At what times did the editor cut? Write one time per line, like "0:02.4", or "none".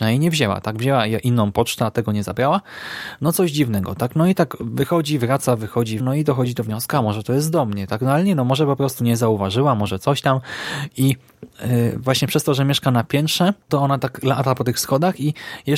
0:06.0
0:13.6